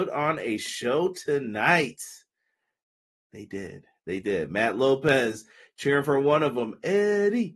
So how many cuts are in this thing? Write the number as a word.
zero